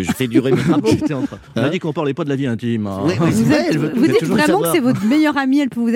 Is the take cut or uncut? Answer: uncut